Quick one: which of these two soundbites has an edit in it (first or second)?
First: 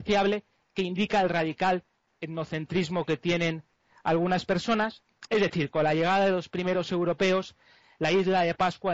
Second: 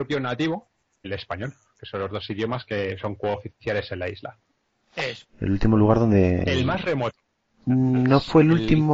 second